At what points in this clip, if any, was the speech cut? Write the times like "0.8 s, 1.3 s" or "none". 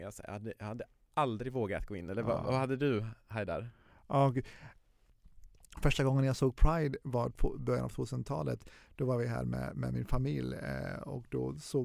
none

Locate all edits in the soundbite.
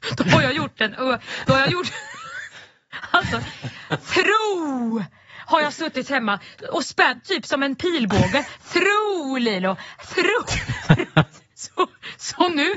none

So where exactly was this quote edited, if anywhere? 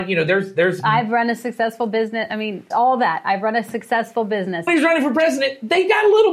2.7 s, 4.7 s

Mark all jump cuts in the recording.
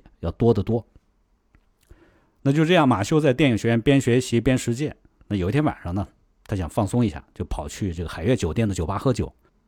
none

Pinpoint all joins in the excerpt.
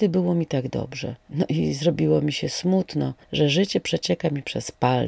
1.2 s, 3.2 s

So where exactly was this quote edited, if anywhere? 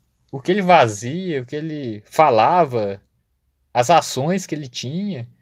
none

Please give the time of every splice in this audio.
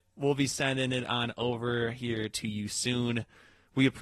none

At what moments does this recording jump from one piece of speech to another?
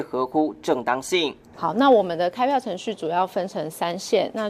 1.5 s

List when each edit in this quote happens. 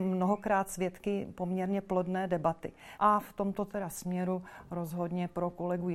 3.0 s

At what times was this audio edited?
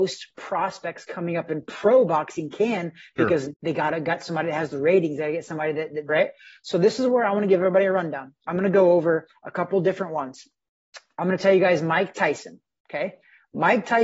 3.5 s, 6.1 s

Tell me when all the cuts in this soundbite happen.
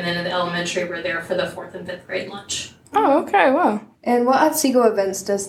4.0 s

